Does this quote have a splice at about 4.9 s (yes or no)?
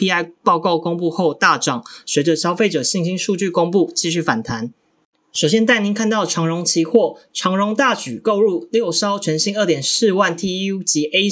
yes